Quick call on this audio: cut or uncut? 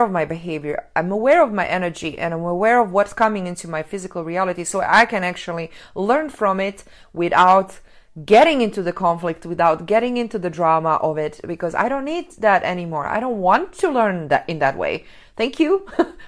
uncut